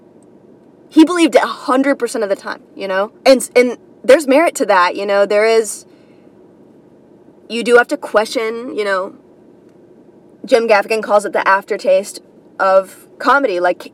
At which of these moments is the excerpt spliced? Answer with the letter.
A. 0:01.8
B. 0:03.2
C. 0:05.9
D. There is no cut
B